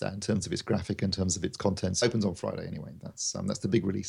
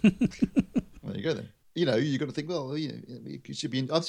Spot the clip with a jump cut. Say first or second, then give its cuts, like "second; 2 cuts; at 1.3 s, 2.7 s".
first; 1 cut; at 2.0 s